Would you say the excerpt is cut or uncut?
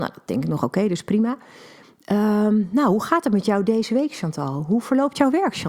uncut